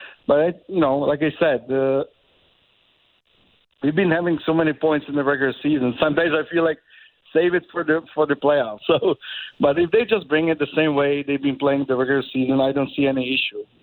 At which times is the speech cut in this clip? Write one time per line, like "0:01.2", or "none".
0:08.8